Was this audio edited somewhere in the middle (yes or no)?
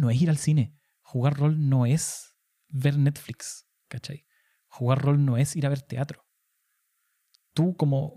no